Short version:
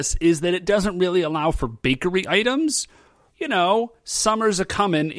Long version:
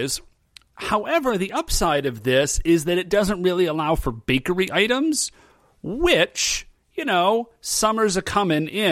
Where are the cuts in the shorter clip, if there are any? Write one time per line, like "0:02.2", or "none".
0:03.3